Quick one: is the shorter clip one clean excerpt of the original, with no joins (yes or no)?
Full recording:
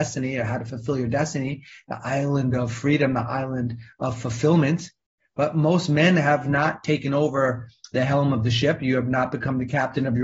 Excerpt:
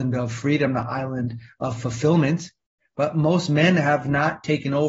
yes